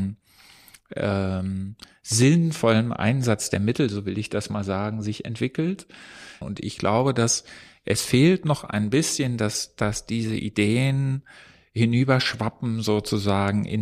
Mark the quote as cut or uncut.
cut